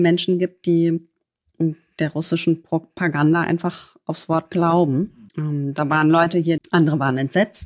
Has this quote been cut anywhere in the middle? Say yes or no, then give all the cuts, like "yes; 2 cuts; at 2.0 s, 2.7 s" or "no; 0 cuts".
yes; 2 cuts; at 5.3 s, 6.6 s